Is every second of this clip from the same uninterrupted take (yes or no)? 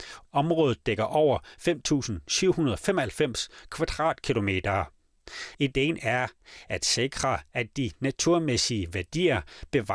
no